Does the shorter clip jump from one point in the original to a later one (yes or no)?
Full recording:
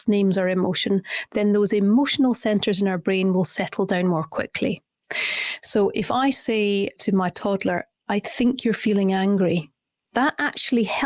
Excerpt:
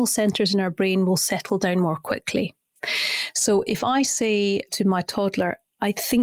no